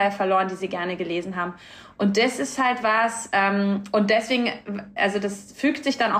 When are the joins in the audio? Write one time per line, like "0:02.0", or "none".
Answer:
none